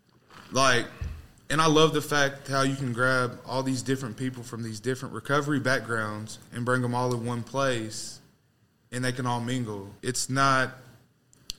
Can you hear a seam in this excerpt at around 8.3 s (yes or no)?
no